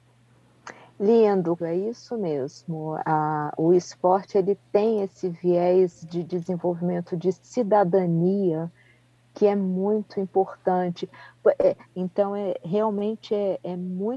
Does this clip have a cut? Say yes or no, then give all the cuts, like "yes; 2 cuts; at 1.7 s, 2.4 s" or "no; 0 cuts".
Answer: yes; 2 cuts; at 1.6 s, 11.8 s